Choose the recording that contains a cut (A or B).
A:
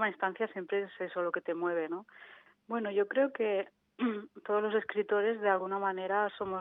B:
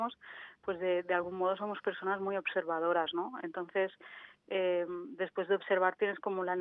A